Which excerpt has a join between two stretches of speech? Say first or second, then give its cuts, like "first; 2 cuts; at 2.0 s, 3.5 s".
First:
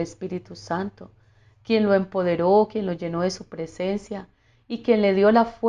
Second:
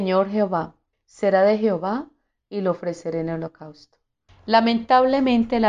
second; 2 cuts; at 0.9 s, 4.3 s